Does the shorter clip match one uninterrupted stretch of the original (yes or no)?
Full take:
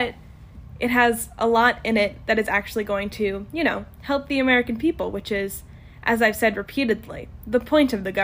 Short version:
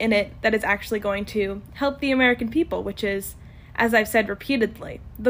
no